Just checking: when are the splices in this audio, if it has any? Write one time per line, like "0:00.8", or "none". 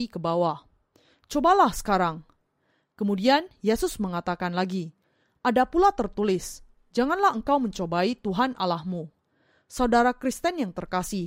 none